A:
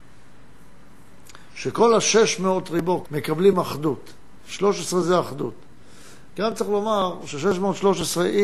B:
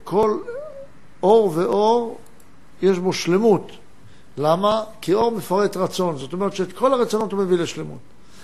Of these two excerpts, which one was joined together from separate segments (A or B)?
A